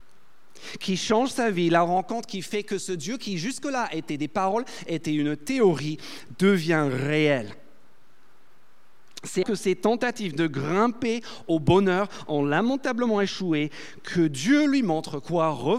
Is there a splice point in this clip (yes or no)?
yes